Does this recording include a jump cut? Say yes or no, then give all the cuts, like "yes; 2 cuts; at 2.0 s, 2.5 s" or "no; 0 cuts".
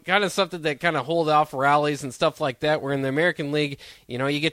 no; 0 cuts